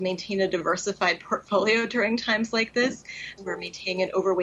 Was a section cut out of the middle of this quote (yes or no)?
yes